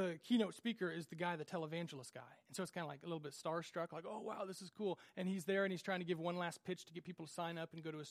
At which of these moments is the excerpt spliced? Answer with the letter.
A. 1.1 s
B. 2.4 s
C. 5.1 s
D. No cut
D